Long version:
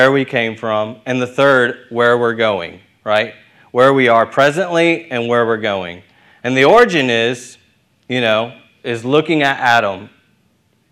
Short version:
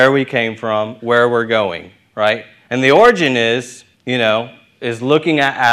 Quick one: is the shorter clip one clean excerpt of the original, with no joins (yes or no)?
no